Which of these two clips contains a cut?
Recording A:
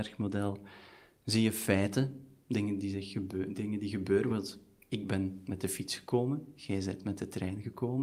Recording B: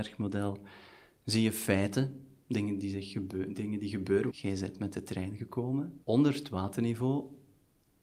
B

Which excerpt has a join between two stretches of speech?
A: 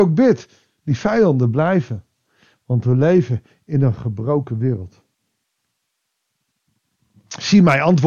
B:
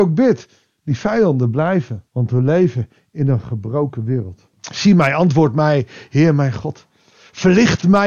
B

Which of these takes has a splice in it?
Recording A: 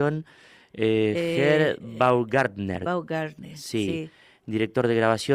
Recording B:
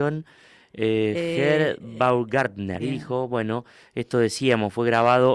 B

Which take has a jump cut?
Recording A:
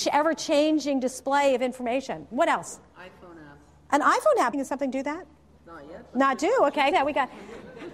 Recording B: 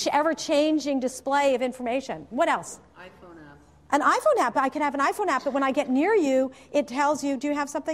A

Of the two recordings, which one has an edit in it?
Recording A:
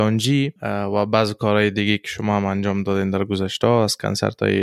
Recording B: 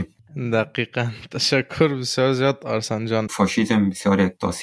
B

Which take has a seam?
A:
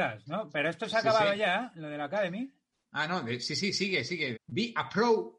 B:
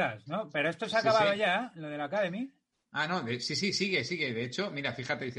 A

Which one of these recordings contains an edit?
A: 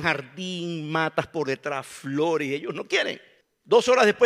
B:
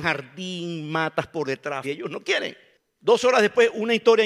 B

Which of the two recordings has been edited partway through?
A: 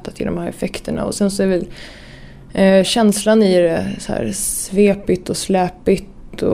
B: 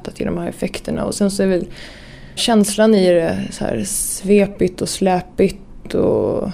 B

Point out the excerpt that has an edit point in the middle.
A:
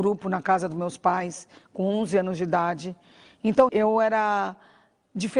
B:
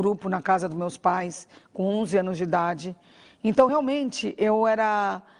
A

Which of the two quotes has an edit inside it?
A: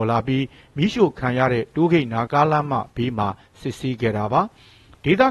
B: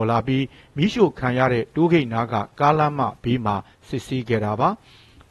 A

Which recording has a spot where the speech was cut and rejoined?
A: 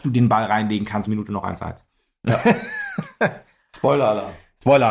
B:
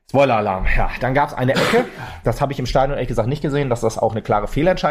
A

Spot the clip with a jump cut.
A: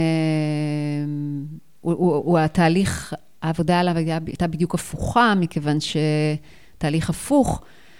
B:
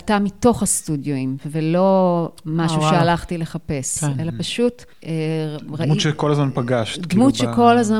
B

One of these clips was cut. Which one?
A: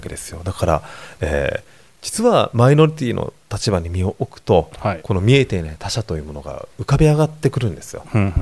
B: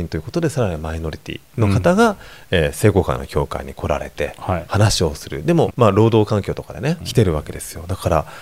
B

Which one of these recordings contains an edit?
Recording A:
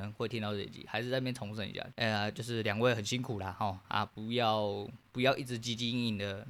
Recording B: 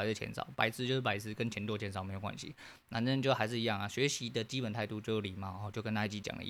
A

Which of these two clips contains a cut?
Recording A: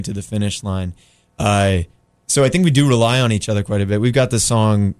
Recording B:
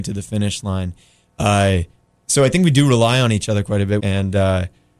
B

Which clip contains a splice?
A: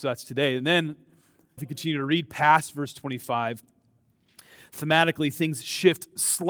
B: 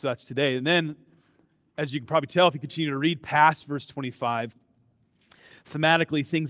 A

